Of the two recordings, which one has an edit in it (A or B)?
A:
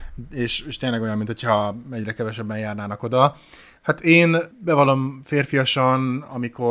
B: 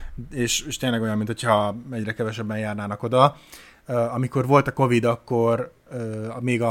A